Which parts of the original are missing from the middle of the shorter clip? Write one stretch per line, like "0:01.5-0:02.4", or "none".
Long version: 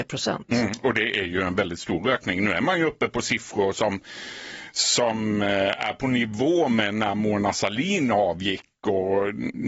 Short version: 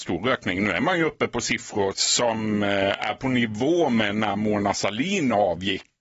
0:03.7-0:04.7